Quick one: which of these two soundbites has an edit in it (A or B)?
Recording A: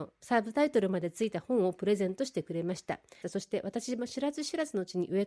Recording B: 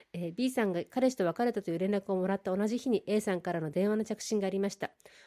A